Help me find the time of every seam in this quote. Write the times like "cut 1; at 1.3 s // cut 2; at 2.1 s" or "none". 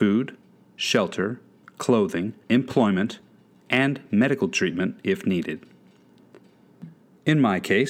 cut 1; at 2.4 s

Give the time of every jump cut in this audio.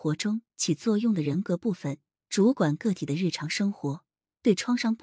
none

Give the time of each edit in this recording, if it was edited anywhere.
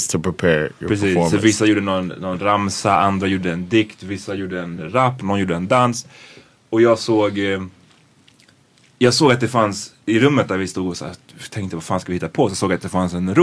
none

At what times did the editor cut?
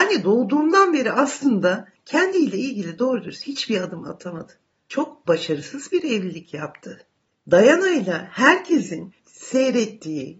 none

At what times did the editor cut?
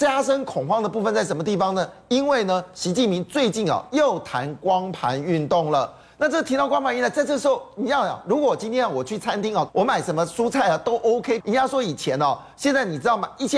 cut 1; at 9.7 s // cut 2; at 11.4 s

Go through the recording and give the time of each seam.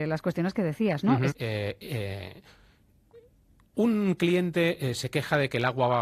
cut 1; at 1.3 s

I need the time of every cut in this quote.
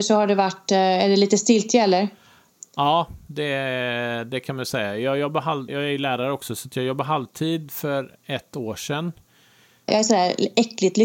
cut 1; at 5.7 s // cut 2; at 9.9 s

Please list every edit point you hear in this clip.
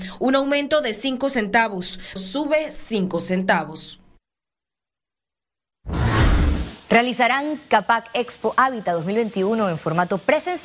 cut 1; at 2.2 s

